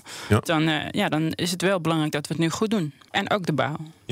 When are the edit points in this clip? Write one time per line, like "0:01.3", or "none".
0:03.1